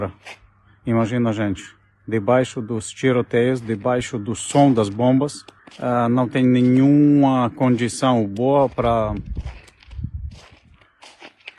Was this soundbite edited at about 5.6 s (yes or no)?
yes